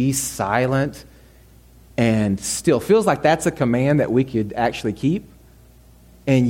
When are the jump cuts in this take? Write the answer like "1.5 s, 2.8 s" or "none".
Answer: none

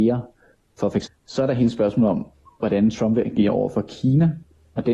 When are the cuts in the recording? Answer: 1.1 s

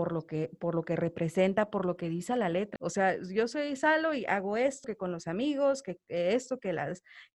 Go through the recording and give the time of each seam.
2.8 s, 4.8 s

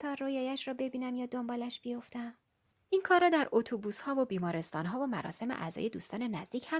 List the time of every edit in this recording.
none

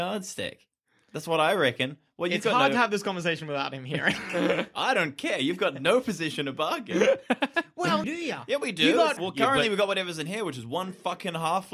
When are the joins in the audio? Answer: 8.0 s, 9.2 s

